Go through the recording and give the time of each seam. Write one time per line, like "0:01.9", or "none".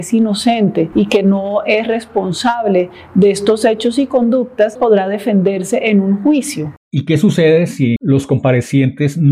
0:04.8
0:06.8
0:08.0